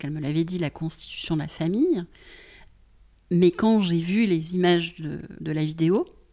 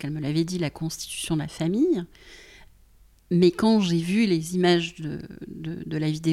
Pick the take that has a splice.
first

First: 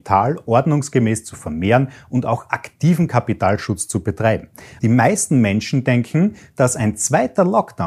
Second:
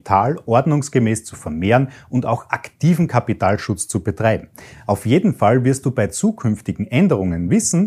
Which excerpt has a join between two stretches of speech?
first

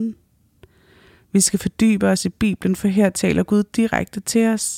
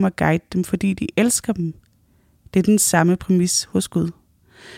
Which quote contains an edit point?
first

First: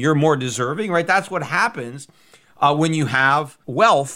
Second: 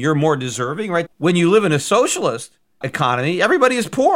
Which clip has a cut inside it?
second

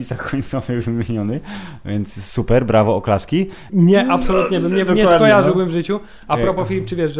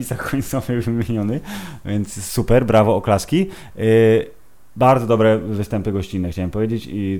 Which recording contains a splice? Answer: first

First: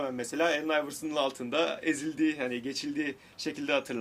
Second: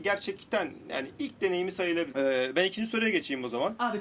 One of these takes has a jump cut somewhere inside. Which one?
second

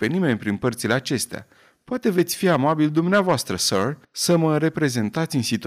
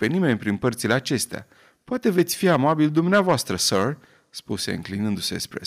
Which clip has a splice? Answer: first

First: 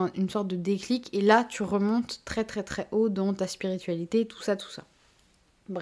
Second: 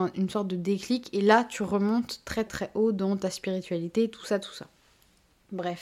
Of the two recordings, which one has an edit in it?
second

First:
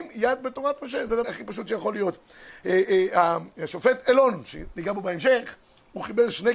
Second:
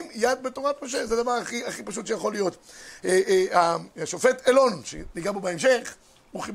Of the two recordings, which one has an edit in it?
first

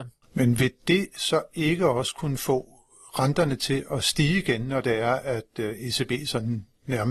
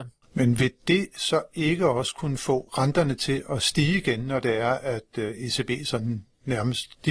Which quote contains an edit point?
second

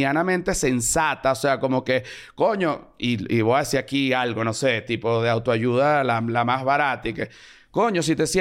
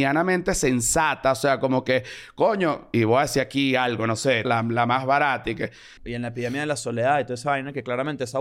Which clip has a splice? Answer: second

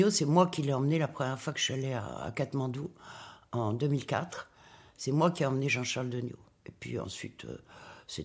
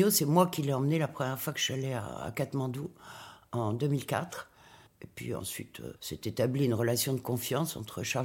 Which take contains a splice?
second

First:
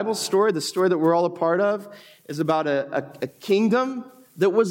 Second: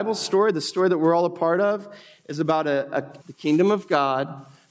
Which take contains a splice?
second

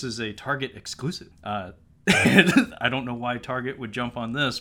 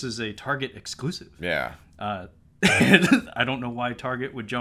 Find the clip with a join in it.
first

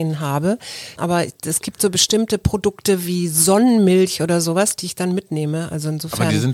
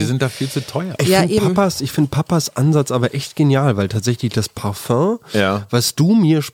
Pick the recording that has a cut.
first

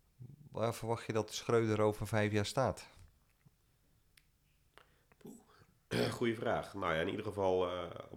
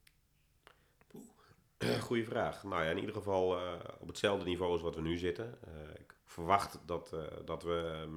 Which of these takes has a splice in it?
second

